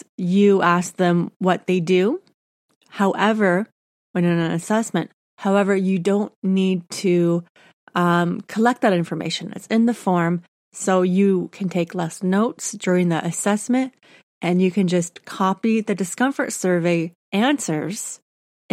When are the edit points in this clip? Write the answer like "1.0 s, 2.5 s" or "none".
none